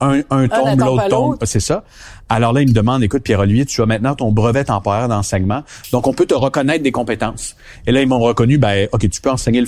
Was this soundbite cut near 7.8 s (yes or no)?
no